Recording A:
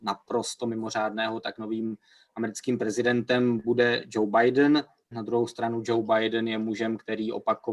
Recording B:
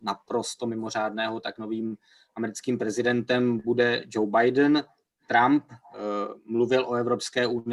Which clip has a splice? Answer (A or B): A